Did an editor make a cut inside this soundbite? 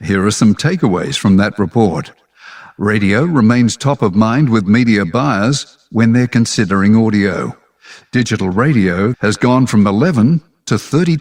yes; 2 cuts; at 8.0 s, 9.1 s

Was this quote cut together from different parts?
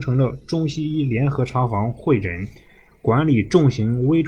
no; 0 cuts

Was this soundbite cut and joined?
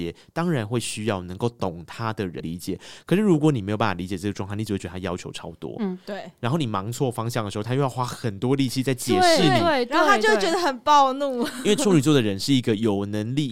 yes; 1 cut; at 2.4 s

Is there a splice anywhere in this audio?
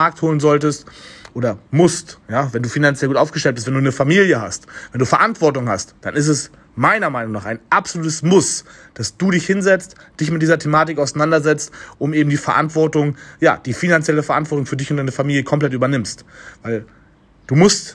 no; 0 cuts

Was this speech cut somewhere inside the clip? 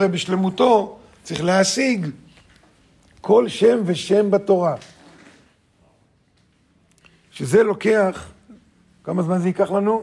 no; 0 cuts

